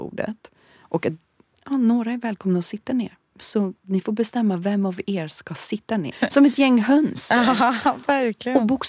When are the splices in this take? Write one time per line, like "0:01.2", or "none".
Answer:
0:06.1